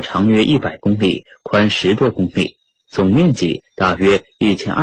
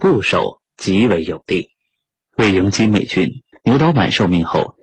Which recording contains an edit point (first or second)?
second